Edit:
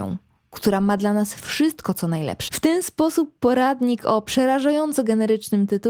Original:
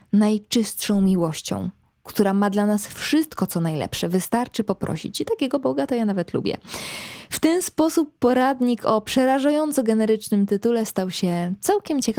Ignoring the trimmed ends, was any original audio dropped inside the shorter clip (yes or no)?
yes